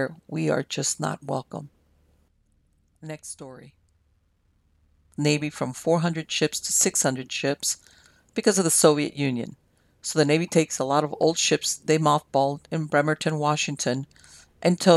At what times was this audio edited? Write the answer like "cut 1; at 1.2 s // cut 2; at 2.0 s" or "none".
cut 1; at 5.2 s